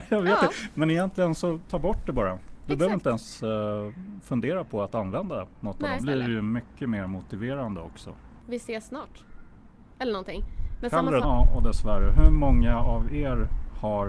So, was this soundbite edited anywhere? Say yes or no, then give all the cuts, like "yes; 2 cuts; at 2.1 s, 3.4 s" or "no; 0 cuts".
yes; 3 cuts; at 6.0 s, 8.4 s, 11.2 s